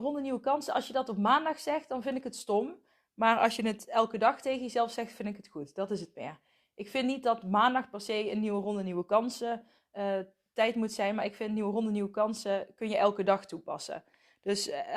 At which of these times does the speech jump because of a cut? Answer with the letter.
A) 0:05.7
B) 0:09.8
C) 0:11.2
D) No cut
D